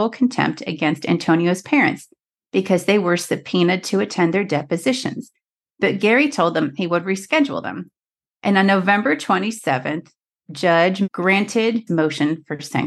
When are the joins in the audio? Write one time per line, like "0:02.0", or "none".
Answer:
none